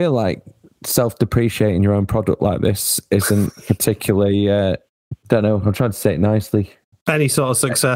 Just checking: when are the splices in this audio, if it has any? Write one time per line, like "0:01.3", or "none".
0:05.2